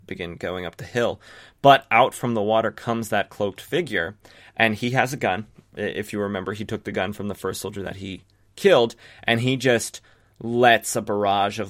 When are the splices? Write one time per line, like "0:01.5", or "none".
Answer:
none